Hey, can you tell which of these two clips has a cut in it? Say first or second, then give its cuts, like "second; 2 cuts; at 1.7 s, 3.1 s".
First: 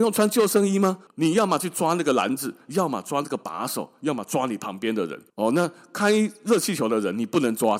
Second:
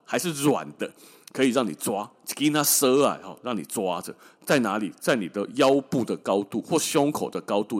first; 2 cuts; at 1.1 s, 5.3 s